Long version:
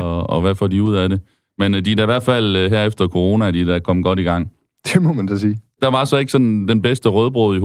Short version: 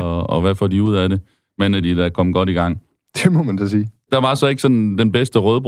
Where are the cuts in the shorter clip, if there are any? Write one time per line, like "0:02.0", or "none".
0:01.8